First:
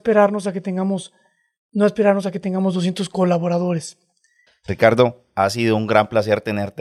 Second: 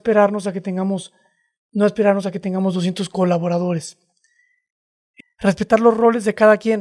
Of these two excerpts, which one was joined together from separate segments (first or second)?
first